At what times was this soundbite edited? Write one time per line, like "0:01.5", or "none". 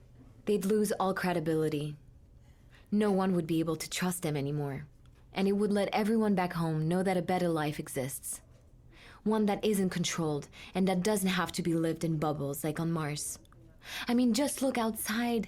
none